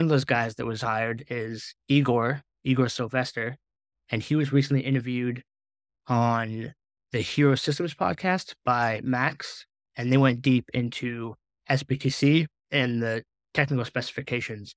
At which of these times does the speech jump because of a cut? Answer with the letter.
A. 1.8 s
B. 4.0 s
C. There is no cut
C